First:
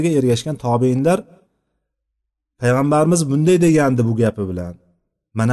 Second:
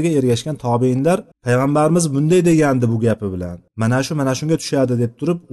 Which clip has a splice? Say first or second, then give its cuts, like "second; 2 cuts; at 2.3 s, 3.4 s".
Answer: second; 2 cuts; at 1.3 s, 3.7 s